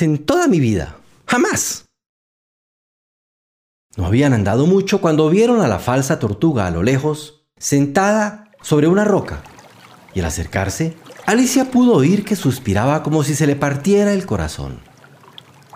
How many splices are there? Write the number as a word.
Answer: one